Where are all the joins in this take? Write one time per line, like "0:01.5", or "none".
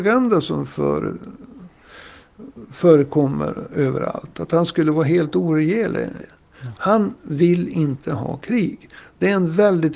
0:06.2